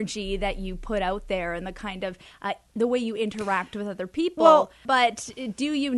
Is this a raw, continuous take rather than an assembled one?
no; 1 cut; at 4.8 s

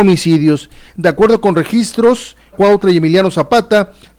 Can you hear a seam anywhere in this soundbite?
yes; 2 cuts; at 0.9 s, 2.5 s

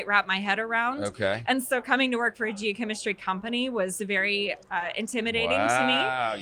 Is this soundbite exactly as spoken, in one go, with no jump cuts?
yes; 0 cuts

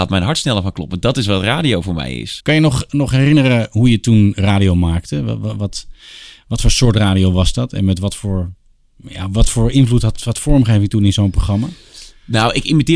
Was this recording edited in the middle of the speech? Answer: yes; 1 cut; at 2.4 s

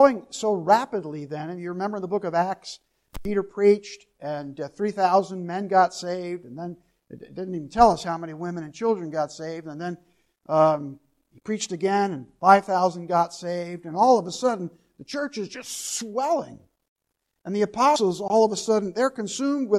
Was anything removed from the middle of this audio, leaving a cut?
no; 0 cuts

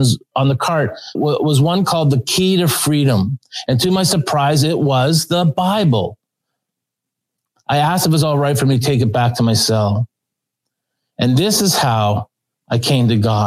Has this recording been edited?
yes; 1 cut; at 1.1 s

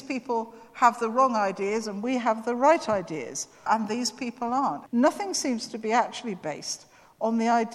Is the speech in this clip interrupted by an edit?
yes; 2 cuts; at 3.7 s, 4.9 s

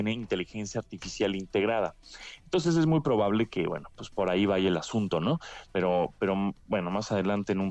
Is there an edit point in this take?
no; 0 cuts

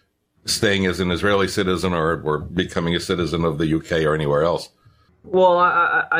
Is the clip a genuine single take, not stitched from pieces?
yes; 0 cuts

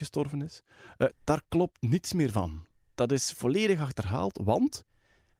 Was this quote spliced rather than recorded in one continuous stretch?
yes; 1 cut; at 1.1 s

